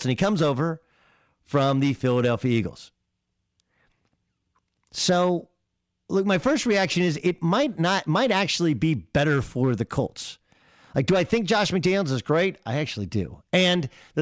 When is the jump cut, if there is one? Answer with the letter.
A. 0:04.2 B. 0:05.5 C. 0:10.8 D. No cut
D